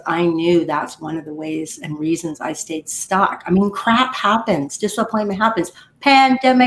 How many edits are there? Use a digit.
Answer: 0